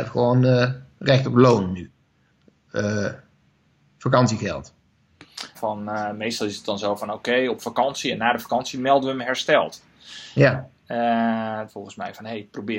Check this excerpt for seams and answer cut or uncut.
cut